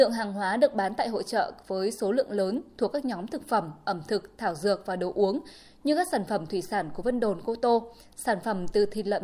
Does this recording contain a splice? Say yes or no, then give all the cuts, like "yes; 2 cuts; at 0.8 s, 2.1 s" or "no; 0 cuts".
no; 0 cuts